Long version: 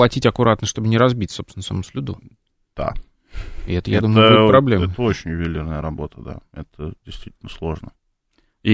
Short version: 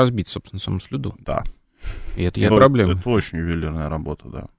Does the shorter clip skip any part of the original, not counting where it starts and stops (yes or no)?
yes